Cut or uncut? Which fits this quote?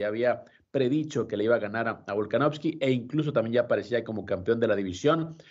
uncut